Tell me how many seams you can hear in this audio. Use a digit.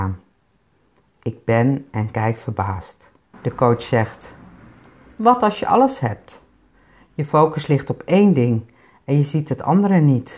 1